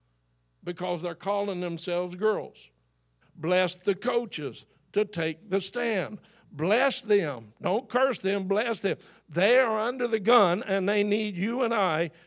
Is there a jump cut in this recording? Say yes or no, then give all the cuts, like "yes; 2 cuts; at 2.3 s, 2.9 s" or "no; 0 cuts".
yes; 1 cut; at 3.2 s